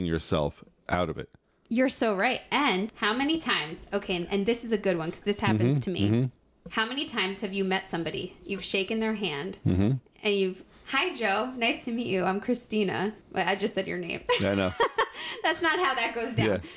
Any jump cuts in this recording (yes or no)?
yes